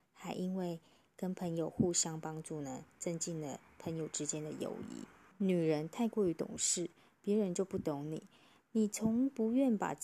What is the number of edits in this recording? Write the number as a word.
one